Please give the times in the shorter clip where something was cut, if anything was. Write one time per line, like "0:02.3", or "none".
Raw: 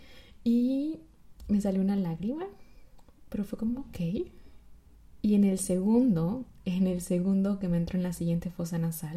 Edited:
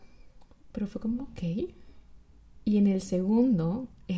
none